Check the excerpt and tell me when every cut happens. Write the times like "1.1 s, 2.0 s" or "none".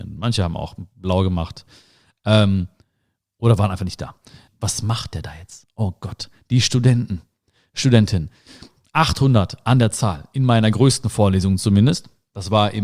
4.5 s